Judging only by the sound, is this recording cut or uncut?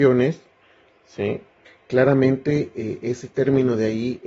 cut